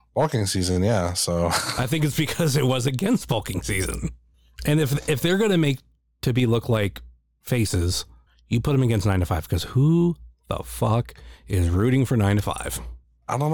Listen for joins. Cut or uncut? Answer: uncut